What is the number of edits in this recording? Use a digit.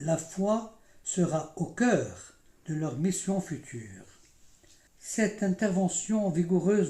1